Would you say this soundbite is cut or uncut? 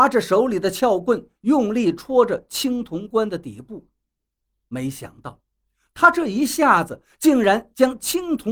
uncut